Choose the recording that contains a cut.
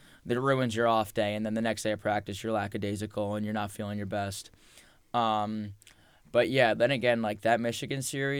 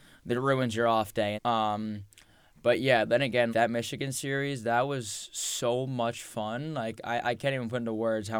second; 2 cuts; at 1.4 s, 3.5 s

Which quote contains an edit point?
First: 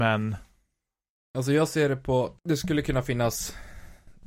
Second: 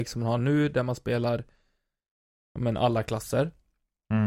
first; 1 cut; at 2.4 s

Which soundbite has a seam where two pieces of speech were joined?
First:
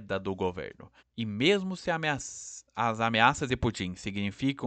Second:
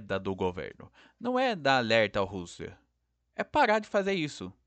first; 1 cut; at 1.0 s

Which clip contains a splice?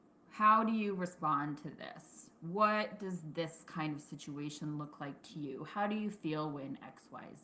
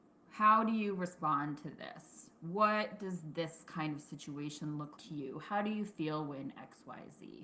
second; 1 cut; at 5.0 s

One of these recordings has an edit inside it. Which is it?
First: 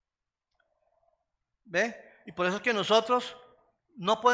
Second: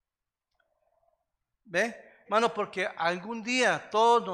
second; 1 cut; at 2.3 s

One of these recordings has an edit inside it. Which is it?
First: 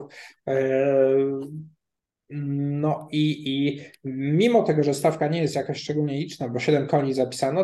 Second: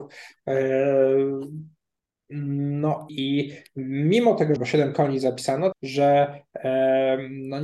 second; 3 cuts; at 3.1 s, 4.6 s, 5.7 s

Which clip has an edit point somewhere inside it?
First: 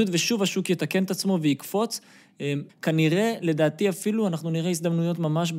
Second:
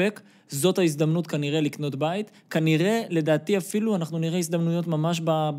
first; 1 cut; at 2.7 s

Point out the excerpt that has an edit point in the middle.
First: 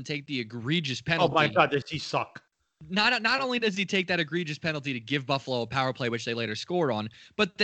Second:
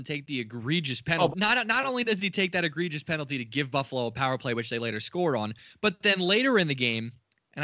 second; 1 cut; at 1.3 s

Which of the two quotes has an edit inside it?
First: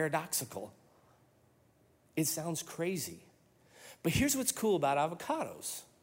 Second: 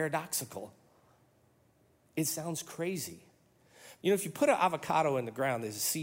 second; 1 cut; at 4.0 s

